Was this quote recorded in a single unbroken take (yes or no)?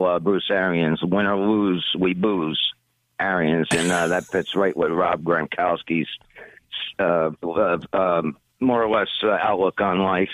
yes